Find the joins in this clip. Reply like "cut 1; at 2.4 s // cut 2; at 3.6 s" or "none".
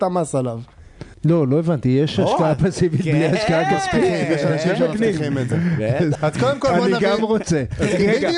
cut 1; at 1.1 s // cut 2; at 6.1 s